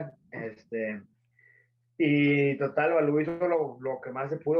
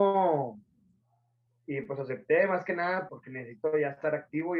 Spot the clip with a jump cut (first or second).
second